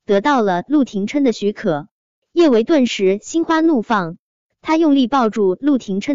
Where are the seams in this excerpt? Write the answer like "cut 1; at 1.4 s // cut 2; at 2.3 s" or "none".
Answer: none